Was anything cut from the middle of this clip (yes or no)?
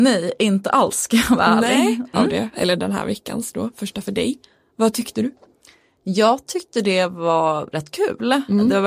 yes